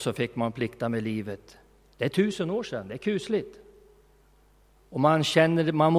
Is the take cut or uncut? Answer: uncut